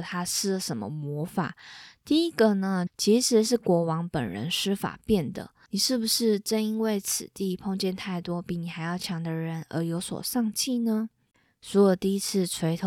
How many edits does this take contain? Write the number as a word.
two